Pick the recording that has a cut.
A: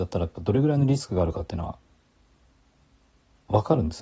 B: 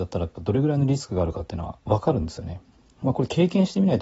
B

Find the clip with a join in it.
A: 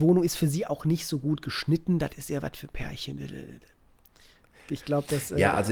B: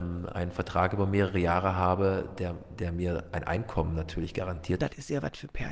B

